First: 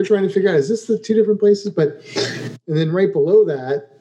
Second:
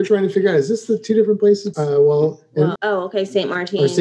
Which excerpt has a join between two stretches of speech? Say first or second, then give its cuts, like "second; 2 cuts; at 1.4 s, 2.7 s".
second; 2 cuts; at 1.7 s, 2.8 s